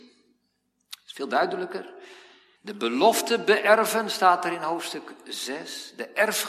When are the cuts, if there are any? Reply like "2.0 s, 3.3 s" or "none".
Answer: 2.6 s